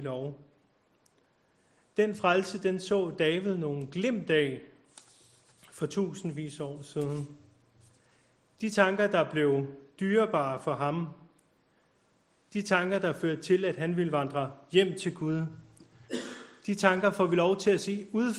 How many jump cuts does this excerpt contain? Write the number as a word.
zero